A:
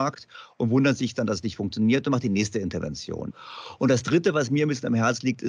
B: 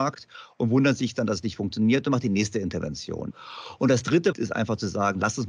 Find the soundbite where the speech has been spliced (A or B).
B